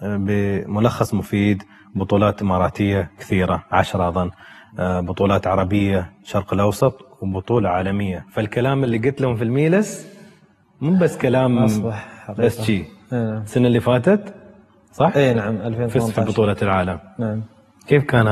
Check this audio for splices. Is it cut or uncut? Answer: uncut